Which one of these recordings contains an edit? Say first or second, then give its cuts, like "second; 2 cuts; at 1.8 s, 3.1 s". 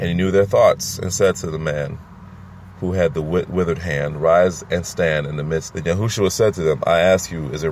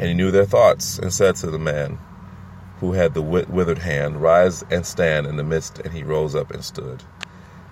first; 1 cut; at 5.7 s